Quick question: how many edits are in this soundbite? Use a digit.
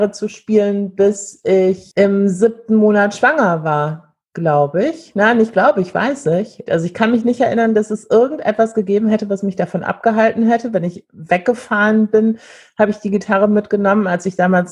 1